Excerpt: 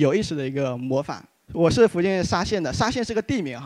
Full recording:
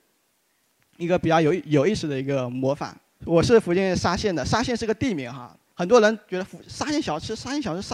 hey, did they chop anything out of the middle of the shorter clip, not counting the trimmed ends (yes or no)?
no